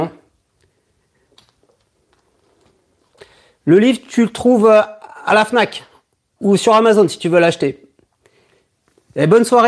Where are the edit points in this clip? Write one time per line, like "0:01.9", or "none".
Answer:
none